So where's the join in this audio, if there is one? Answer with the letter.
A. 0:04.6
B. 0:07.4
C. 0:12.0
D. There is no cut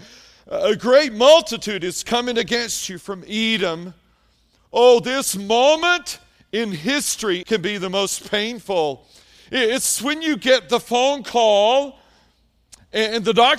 B